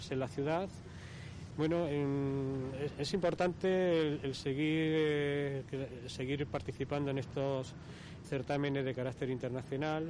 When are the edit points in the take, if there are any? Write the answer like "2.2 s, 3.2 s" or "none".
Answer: 1.5 s, 8.2 s